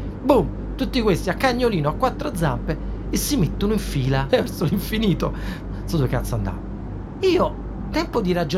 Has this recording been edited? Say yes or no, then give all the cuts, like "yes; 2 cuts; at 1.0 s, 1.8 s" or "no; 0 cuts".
yes; 2 cuts; at 4.3 s, 5.6 s